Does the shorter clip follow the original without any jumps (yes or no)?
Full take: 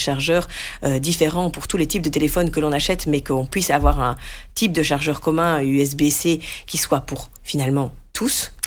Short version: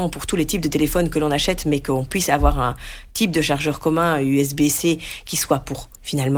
yes